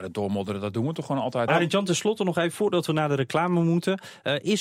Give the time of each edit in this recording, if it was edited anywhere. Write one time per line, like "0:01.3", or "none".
0:01.5

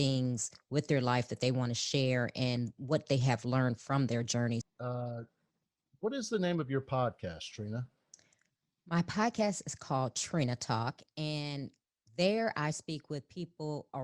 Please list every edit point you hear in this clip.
0:04.6

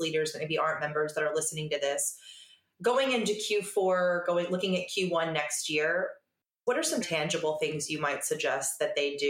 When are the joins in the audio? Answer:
0:07.0

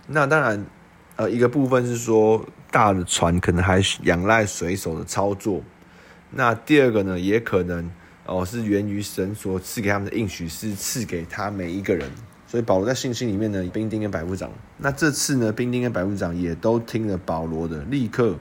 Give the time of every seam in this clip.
0:13.7

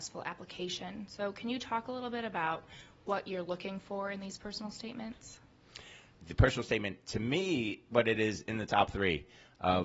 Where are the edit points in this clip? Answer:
0:06.2
0:07.9

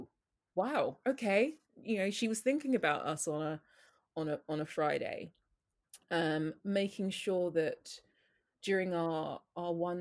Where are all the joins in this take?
none

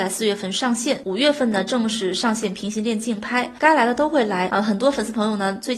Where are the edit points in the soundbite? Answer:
none

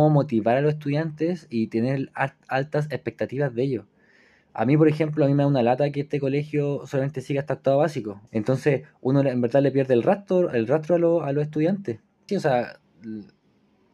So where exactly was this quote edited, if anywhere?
0:08.3
0:12.3

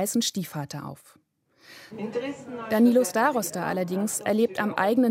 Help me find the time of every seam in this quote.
0:01.9

